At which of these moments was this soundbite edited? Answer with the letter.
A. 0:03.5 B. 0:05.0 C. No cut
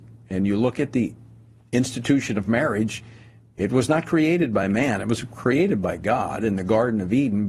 C